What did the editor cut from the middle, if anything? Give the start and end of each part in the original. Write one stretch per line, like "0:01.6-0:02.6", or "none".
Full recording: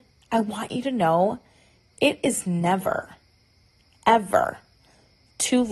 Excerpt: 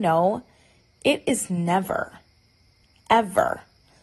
none

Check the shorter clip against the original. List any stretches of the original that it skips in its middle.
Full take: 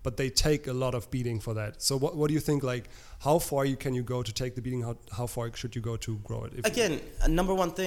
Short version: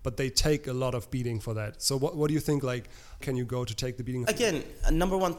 0:03.2-0:03.8
0:04.8-0:06.6

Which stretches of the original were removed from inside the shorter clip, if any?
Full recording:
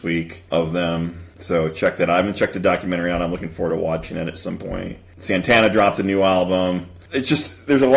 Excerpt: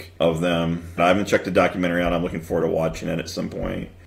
0:01.3-0:02.1

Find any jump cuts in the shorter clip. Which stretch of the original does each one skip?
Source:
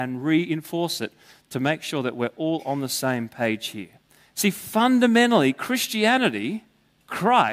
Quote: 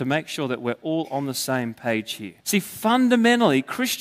0:03.9-0:04.3

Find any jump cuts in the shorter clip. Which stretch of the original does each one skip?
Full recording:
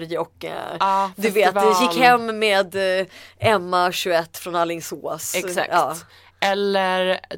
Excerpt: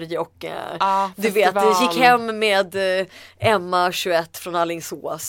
none

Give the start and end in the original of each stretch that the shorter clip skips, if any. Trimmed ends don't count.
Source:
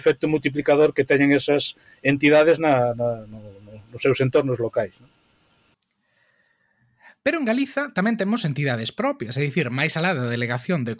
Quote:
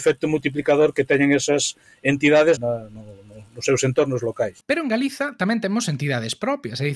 0:02.6-0:02.9
0:05.0-0:07.2

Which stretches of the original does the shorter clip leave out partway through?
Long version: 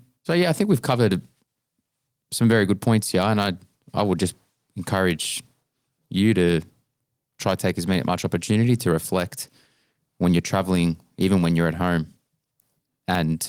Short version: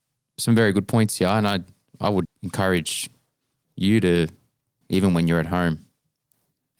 0:04.2-0:04.6
0:07.1-0:11.1

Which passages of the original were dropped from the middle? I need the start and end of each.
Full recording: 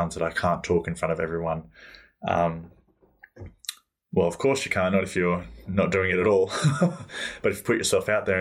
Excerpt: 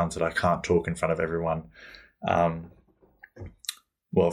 none

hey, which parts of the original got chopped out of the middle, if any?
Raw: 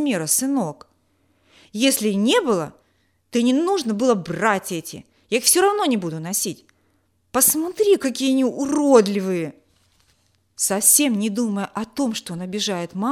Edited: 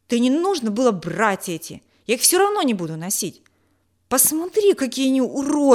none

